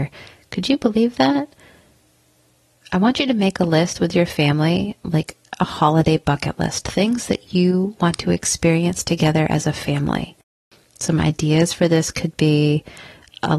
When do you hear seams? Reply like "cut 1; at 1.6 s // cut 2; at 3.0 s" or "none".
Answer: none